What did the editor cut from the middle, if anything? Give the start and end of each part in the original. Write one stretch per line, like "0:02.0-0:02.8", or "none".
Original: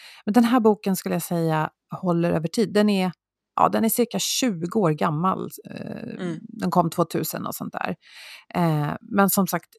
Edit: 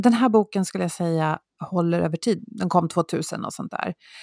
0:02.7-0:06.4